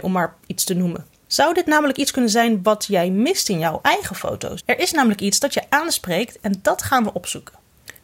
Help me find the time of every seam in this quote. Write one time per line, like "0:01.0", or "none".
0:04.6